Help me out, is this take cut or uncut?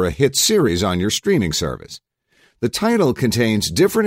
uncut